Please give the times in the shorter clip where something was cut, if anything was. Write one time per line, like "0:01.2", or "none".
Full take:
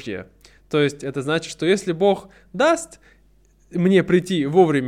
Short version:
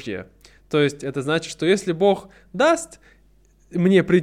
none